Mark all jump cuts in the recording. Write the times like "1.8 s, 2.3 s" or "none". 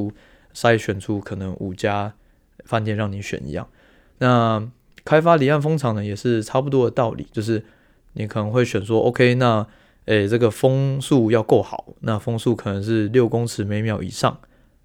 none